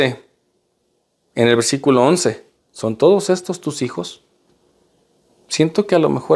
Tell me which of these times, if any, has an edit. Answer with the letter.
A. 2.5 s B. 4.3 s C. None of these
A